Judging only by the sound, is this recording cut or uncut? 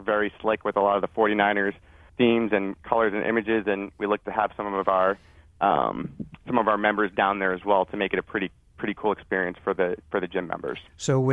cut